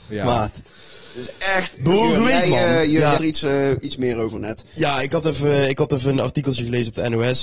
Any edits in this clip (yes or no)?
yes